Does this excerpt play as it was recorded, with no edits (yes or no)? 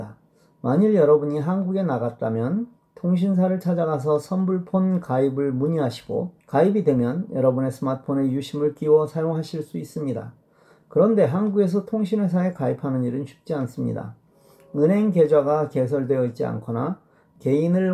no